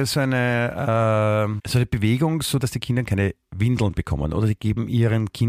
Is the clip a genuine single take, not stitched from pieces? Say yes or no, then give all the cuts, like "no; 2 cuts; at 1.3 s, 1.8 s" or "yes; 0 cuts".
no; 2 cuts; at 1.6 s, 2.6 s